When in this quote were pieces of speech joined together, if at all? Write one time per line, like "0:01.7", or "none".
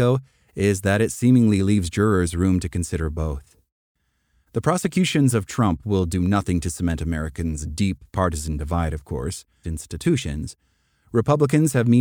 0:09.6